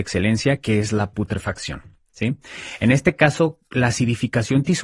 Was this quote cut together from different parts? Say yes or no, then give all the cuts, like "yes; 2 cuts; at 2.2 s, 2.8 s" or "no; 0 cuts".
no; 0 cuts